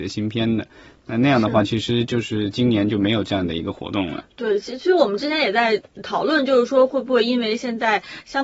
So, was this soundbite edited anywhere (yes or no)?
no